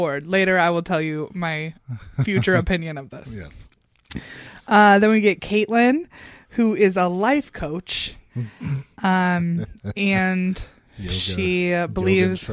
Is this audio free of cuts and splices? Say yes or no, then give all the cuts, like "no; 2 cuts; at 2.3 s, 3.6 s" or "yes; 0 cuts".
yes; 0 cuts